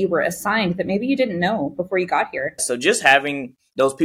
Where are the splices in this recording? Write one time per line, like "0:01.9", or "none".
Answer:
0:02.6